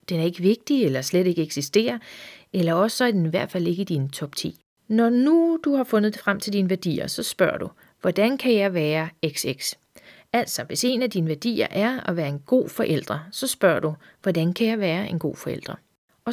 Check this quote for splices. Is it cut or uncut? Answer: uncut